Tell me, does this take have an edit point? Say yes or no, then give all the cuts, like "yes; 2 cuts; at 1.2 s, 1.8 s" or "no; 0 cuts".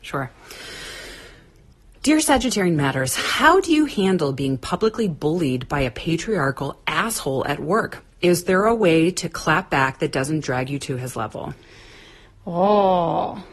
no; 0 cuts